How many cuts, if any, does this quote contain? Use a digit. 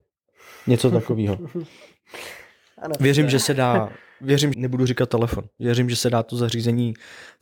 1